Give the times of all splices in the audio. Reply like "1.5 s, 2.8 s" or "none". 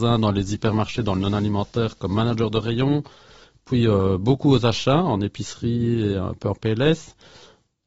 none

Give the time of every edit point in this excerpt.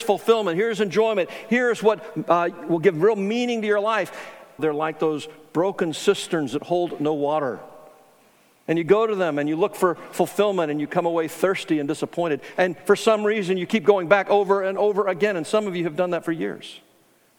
4.6 s

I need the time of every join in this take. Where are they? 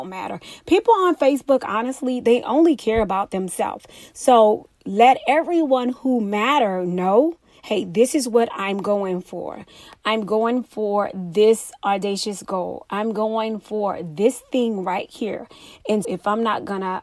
16.0 s

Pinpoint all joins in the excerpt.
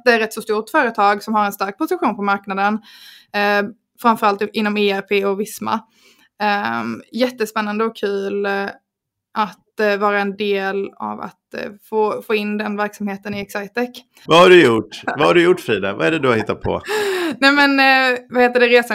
14.3 s

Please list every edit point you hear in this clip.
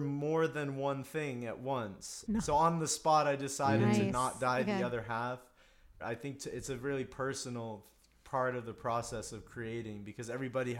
2.3 s, 6.0 s

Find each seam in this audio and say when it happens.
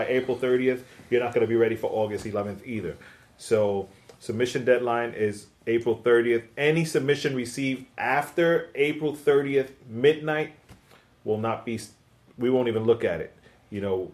none

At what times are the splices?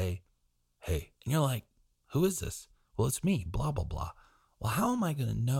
1.2 s

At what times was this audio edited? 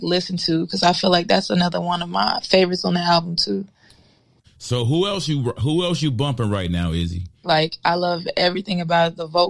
4.4 s, 7.4 s

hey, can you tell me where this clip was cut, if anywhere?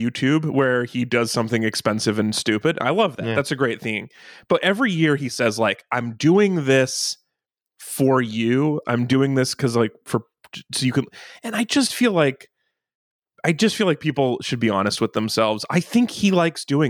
8.8 s

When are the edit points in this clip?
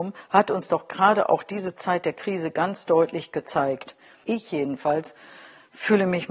4.2 s

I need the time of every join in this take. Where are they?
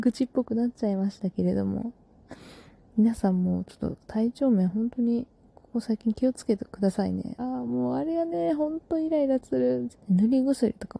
7.4 s, 9.9 s

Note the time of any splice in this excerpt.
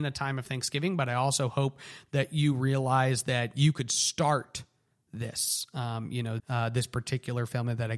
6.4 s

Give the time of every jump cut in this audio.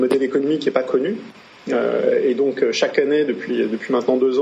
none

